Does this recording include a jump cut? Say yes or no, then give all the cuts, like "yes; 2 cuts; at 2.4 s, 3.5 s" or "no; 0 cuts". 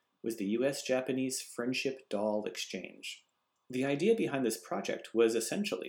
no; 0 cuts